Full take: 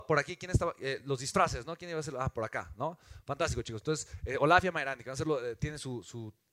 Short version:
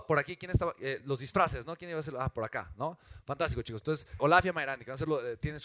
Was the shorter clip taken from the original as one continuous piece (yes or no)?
no